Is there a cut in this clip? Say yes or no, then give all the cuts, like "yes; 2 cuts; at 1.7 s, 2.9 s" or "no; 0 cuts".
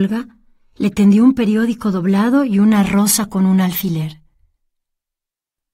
no; 0 cuts